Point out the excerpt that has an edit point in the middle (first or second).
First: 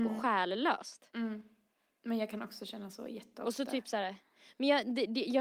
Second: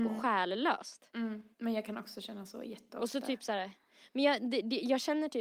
second